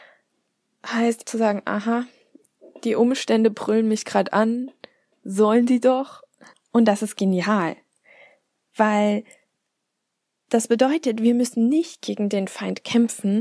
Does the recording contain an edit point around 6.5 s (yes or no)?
yes